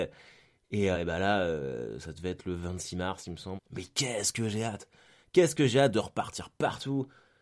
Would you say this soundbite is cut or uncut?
cut